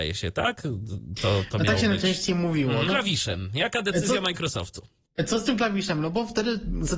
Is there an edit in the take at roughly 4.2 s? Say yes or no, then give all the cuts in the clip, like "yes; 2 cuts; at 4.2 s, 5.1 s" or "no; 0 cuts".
no; 1 cut; at 2.9 s